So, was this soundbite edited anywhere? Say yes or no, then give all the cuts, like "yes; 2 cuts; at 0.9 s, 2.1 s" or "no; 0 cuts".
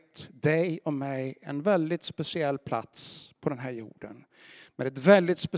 no; 0 cuts